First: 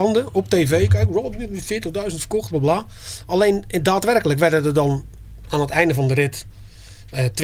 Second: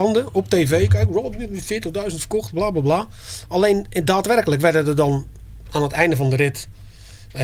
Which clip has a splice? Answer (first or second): first